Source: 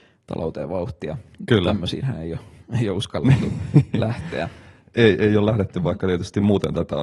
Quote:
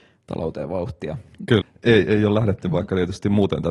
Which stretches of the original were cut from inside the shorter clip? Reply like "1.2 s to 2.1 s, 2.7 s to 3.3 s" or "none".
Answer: 1.6 s to 4.7 s

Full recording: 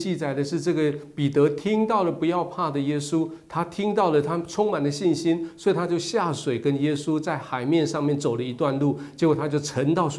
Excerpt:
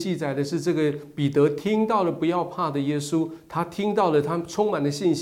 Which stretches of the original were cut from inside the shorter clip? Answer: none

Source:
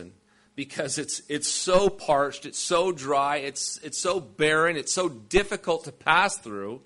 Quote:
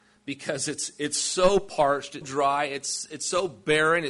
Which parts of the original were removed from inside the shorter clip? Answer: 2.5 s to 2.9 s

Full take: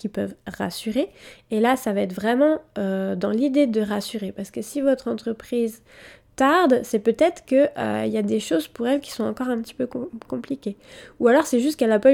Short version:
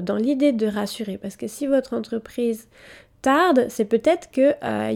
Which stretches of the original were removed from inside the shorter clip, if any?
none

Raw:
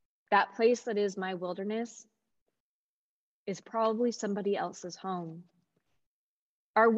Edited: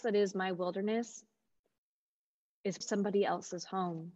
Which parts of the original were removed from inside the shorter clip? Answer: 3.6 s to 4.1 s

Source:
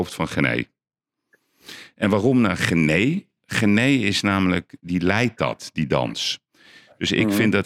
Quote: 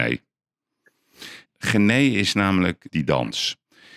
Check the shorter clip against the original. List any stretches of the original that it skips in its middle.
1.9 s to 3.3 s, 4.8 s to 5.7 s

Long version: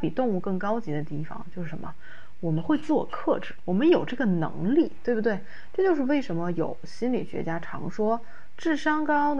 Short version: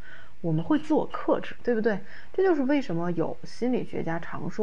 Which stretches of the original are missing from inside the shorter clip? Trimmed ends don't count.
3.6 s to 5.0 s

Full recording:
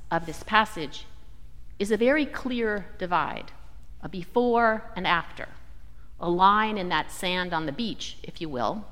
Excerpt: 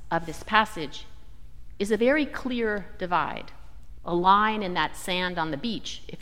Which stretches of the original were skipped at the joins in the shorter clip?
4.0 s to 6.1 s

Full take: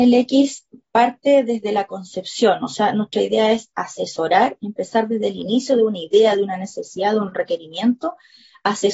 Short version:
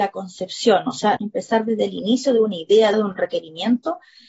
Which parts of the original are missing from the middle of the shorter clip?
2.9 s to 4.6 s, 6.4 s to 7.1 s

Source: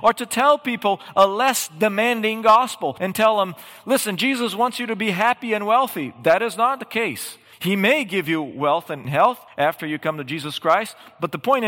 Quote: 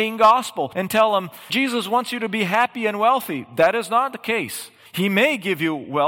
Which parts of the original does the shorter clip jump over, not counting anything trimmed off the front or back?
3.7 s to 4.2 s

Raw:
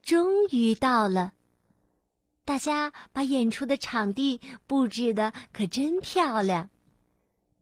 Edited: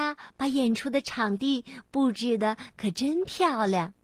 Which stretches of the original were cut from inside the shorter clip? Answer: none

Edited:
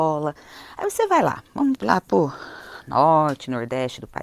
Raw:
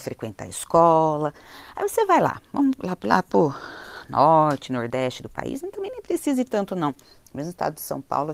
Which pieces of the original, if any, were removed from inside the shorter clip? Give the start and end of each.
2.8 s to 3.0 s

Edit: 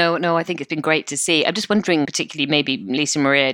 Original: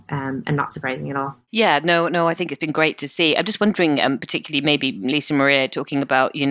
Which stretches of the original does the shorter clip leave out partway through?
4.0 s to 4.2 s

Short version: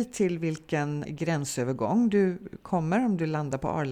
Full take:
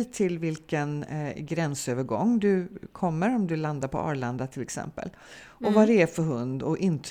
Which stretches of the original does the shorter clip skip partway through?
1.0 s to 1.3 s

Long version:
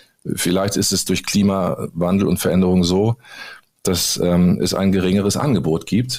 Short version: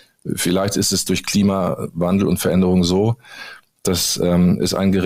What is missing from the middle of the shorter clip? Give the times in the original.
none

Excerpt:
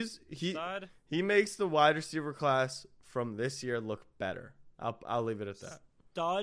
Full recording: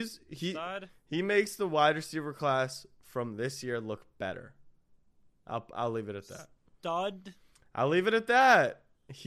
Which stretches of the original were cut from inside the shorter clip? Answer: 4.7 s to 5.4 s

